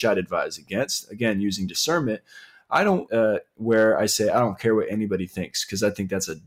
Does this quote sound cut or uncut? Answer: cut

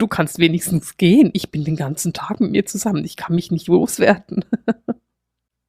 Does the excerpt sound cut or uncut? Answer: uncut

